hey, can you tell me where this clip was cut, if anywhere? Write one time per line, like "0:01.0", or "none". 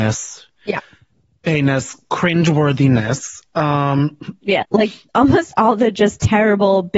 0:04.6